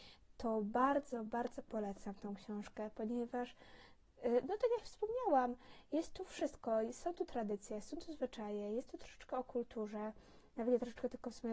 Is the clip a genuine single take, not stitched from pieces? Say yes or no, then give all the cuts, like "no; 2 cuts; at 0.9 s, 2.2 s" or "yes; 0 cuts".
yes; 0 cuts